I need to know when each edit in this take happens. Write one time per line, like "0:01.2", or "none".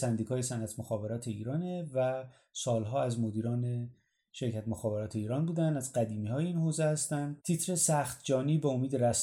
0:07.4